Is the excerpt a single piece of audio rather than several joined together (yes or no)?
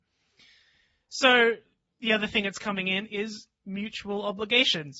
yes